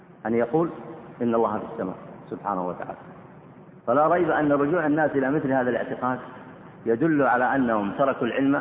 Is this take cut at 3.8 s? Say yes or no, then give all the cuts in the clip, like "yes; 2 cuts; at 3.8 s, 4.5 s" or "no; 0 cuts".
yes; 1 cut; at 3.8 s